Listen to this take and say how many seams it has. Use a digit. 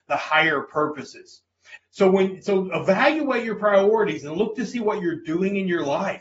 1